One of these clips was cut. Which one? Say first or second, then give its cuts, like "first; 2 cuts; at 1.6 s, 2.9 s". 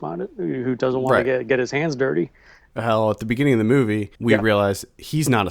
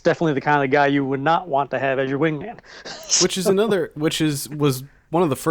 first; 2 cuts; at 2.7 s, 4.2 s